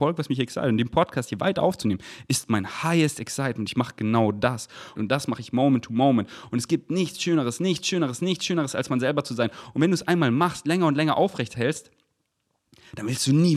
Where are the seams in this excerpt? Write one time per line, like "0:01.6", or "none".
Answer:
0:05.0

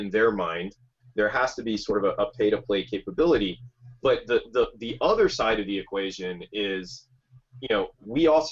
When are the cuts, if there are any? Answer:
none

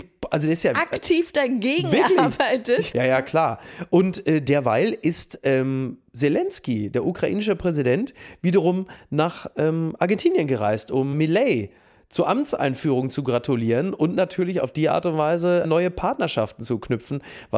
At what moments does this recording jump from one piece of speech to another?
0:02.9
0:11.1
0:15.6

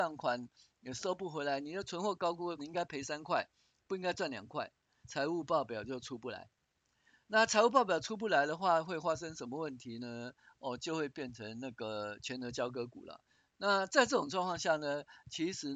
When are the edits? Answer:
0:02.6
0:05.0

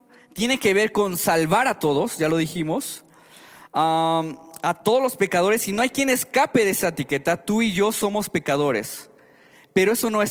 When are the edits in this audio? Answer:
none

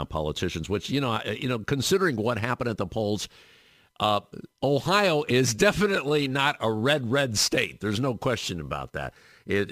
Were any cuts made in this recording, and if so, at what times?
none

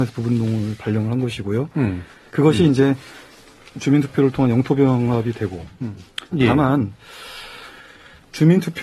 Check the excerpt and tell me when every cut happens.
0:02.3
0:06.3

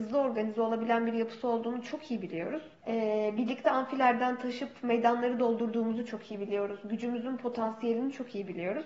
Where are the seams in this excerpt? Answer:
0:02.8

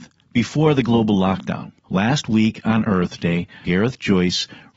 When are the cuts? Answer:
0:01.8
0:03.6

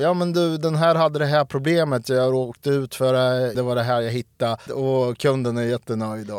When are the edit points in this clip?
0:03.5
0:04.7

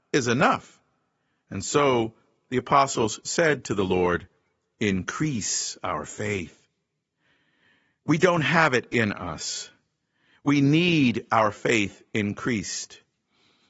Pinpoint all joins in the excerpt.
none

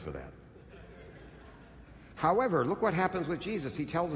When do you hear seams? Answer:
none

